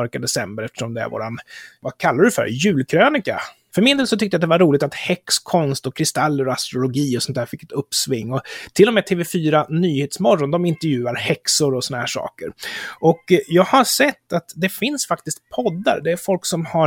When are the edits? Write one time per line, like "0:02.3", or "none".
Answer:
0:03.7